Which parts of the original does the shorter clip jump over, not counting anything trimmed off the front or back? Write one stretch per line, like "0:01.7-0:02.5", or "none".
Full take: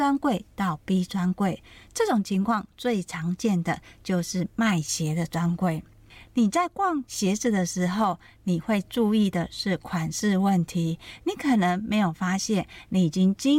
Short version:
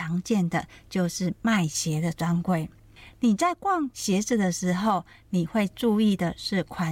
none